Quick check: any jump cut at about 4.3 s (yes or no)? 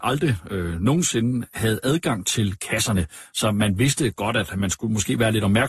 no